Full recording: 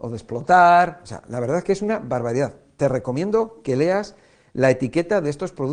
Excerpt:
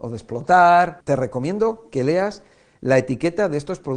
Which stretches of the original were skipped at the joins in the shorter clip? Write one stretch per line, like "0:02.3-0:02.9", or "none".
0:01.0-0:02.7

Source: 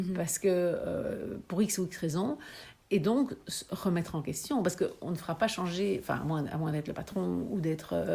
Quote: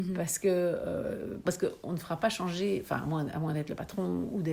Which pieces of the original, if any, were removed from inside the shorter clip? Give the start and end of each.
0:01.5-0:04.6

